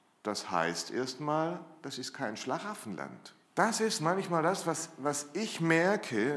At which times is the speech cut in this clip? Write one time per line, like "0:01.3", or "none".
0:03.4